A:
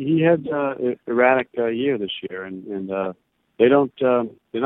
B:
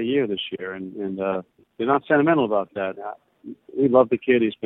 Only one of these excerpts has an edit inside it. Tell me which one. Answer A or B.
B